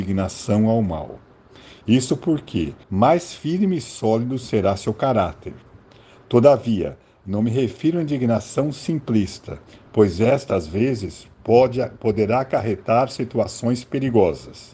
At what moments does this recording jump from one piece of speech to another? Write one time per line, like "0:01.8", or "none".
0:02.8